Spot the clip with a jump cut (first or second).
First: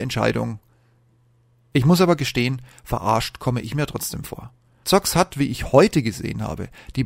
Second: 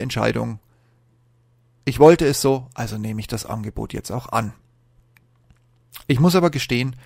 first